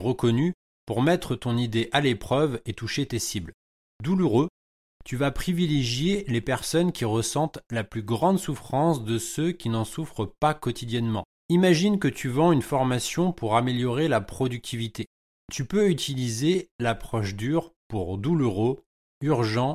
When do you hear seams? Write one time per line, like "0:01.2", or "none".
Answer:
0:15.3